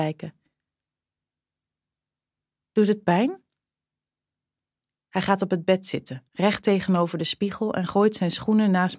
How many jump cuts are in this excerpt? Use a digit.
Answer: 2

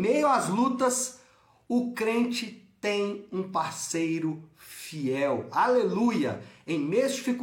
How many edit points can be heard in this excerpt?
0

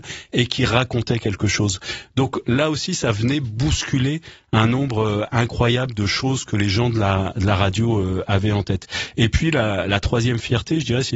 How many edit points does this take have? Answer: 0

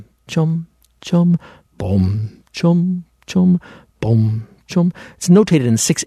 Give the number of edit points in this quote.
0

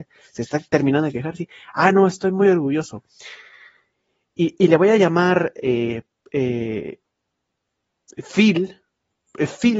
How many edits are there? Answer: 0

